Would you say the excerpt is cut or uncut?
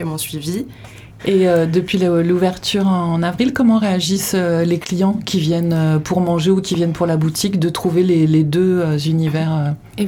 cut